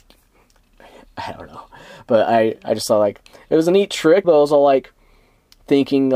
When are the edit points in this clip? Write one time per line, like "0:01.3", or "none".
0:04.2